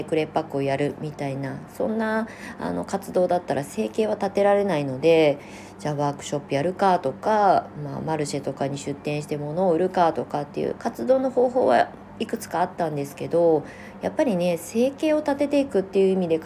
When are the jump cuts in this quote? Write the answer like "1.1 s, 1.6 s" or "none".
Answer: 10.8 s

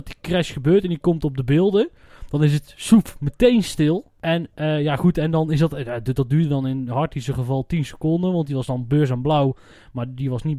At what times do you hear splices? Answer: none

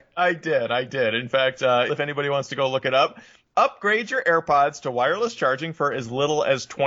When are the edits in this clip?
1.9 s

